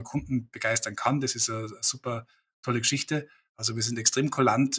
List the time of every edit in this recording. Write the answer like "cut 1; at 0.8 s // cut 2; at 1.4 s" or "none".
cut 1; at 3.5 s